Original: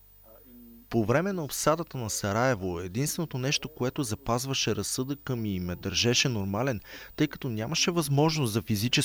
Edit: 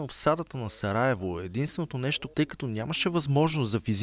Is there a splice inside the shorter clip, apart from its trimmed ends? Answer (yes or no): yes